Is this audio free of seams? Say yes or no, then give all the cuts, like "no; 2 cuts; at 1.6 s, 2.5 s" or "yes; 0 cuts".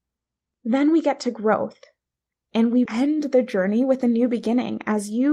no; 1 cut; at 2.9 s